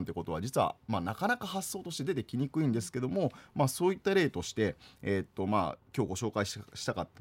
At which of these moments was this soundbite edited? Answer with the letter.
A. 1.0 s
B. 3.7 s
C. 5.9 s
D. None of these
D